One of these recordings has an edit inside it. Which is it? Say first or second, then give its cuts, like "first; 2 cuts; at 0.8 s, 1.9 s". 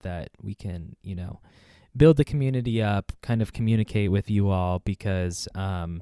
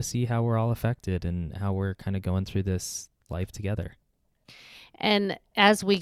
second; 1 cut; at 3.2 s